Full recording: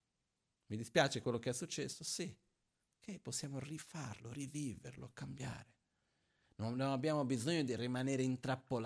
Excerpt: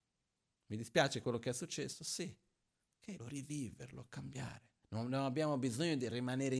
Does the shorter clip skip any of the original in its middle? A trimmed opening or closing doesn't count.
yes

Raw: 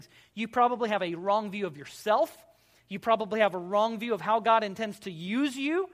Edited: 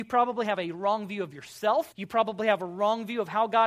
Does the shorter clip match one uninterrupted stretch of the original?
no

